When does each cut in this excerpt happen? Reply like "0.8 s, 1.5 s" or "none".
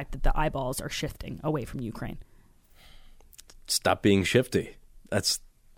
none